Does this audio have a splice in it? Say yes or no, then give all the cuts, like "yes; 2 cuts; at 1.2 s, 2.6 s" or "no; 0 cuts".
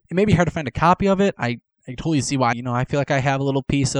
yes; 1 cut; at 2.5 s